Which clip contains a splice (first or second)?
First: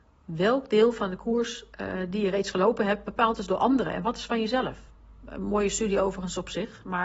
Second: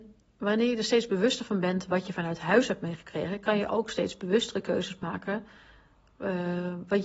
first